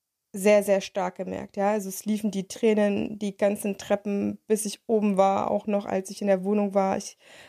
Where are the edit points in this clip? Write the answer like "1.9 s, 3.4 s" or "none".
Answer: none